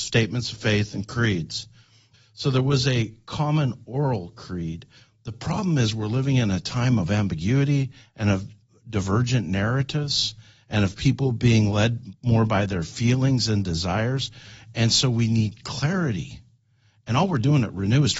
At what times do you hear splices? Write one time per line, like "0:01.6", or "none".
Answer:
0:02.1